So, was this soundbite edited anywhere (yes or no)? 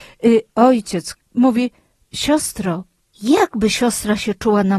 yes